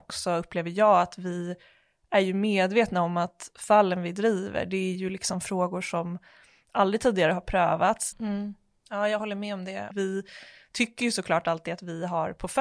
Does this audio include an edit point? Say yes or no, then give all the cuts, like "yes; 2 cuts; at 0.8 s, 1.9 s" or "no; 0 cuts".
yes; 2 cuts; at 8.1 s, 9.9 s